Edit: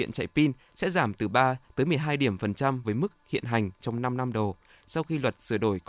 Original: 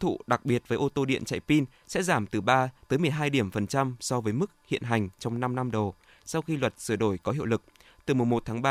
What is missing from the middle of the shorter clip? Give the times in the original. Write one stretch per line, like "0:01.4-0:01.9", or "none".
0:04.0-0:04.2